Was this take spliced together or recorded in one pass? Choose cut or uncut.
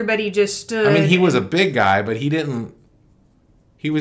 uncut